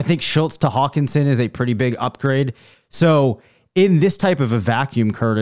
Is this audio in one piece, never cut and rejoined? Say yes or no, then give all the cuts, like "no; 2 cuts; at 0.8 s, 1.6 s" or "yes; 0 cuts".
no; 1 cut; at 2.7 s